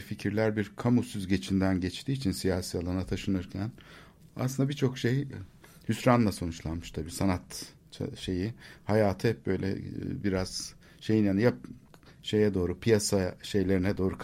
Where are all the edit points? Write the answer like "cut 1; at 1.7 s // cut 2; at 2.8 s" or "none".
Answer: none